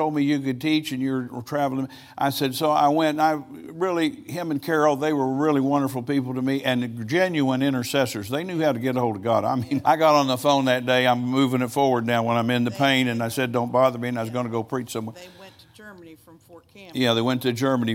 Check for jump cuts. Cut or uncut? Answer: cut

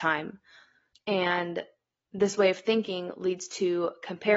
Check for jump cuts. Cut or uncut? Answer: cut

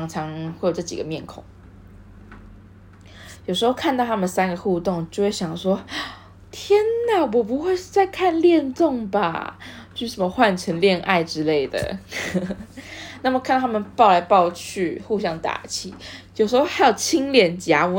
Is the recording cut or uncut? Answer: uncut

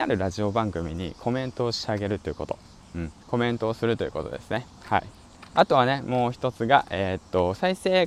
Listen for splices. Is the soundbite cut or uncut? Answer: cut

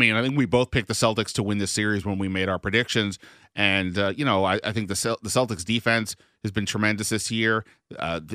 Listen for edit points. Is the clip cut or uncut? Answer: uncut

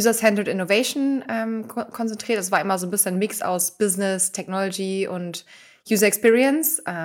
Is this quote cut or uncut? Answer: uncut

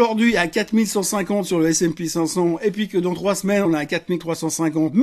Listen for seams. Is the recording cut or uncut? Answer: uncut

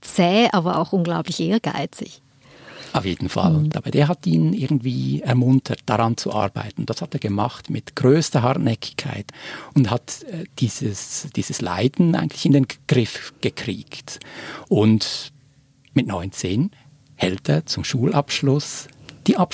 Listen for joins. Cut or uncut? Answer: cut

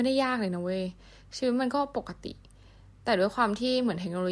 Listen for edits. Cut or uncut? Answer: uncut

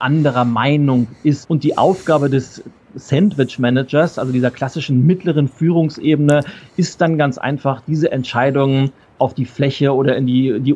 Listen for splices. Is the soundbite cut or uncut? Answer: cut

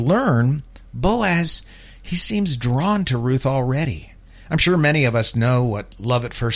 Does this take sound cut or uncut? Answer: uncut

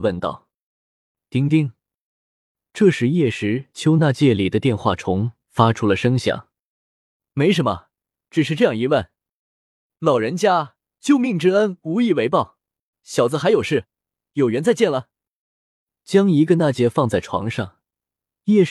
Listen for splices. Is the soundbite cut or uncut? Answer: cut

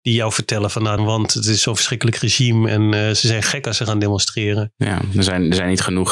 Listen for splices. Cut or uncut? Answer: cut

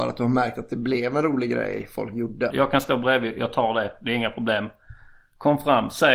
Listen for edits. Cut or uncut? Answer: cut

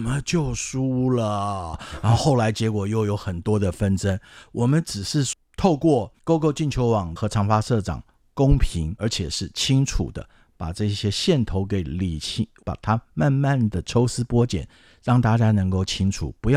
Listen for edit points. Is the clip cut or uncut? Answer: uncut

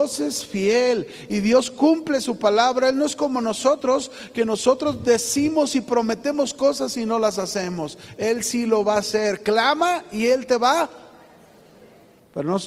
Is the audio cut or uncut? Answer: uncut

